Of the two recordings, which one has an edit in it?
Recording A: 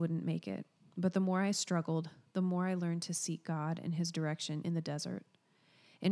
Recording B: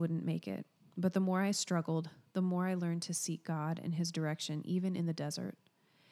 A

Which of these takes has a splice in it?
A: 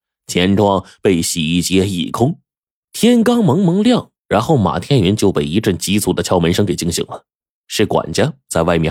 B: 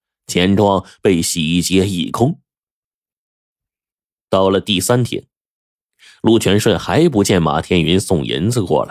A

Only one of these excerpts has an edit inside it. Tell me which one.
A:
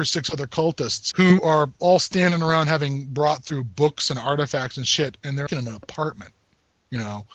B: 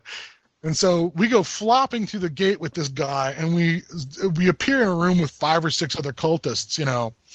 A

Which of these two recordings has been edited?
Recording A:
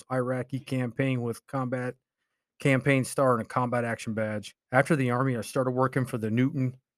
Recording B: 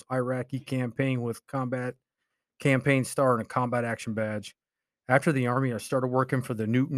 A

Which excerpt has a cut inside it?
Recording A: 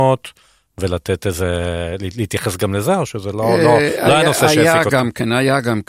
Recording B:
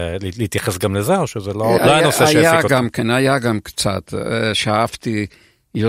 B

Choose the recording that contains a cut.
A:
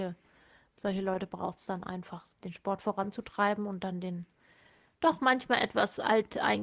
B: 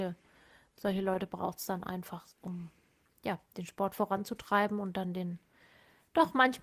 A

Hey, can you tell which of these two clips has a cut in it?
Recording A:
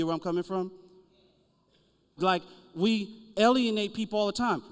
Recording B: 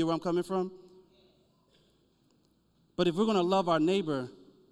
A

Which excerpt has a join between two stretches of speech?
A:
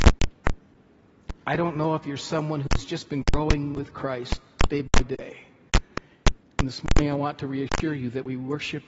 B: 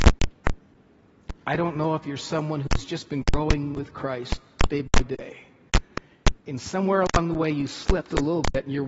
A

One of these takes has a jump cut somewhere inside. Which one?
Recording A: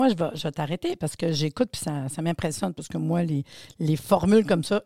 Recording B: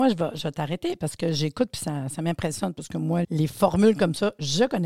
B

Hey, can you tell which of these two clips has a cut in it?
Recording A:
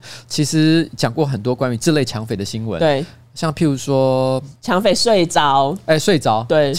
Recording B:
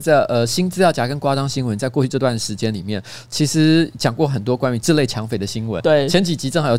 B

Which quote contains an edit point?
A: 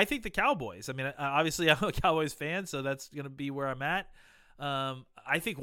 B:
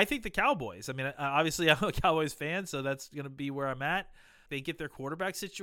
B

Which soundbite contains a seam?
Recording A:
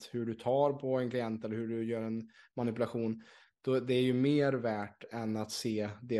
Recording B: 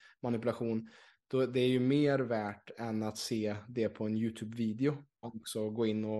B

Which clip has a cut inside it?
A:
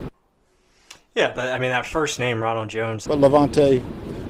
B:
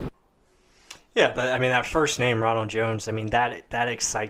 A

